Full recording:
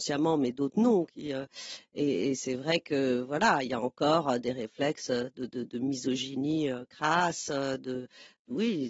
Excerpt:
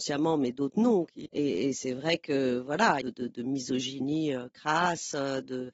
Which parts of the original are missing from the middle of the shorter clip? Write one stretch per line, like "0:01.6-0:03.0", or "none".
0:01.3-0:01.9
0:03.6-0:05.4